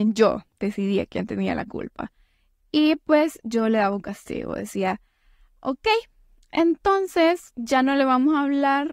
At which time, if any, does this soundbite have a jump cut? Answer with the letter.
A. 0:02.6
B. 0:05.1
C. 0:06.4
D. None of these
D